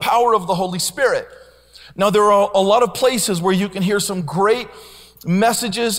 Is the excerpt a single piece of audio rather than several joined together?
yes; 0 cuts

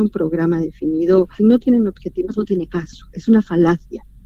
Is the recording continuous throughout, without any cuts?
no; 1 cut; at 1.4 s

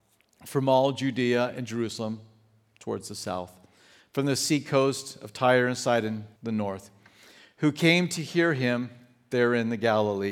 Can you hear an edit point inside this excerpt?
yes; 1 cut; at 6.4 s

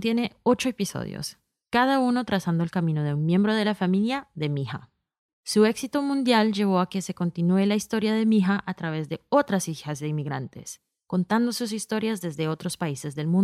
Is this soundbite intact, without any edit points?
no; 1 cut; at 5.3 s

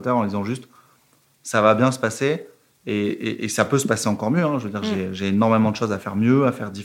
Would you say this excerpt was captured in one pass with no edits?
yes; 0 cuts

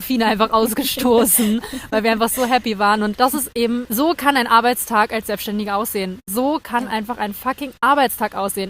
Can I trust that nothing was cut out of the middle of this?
yes; 0 cuts

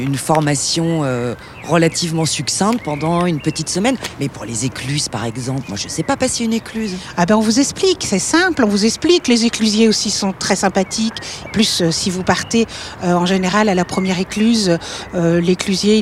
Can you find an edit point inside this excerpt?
no; 0 cuts

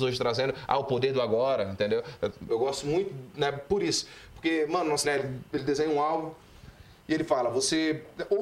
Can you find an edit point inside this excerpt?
yes; 2 cuts; at 2.5 s, 5.0 s

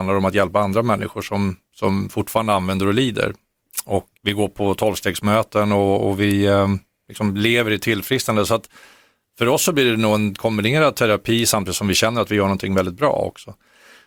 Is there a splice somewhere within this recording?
yes; 1 cut; at 4.1 s

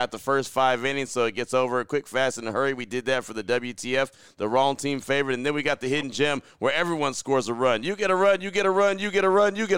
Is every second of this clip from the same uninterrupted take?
yes; 0 cuts

